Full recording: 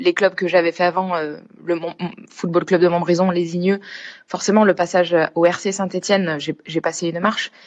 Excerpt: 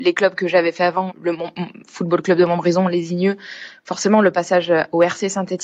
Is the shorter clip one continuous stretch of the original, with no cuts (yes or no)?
no